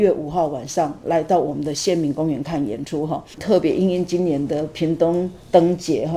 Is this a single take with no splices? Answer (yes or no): yes